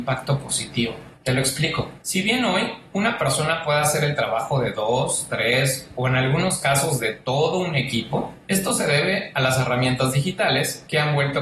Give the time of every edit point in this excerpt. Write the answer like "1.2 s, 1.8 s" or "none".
none